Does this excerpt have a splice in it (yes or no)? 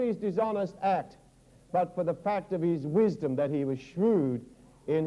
no